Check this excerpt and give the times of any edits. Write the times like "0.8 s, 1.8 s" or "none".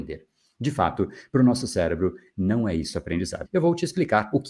3.4 s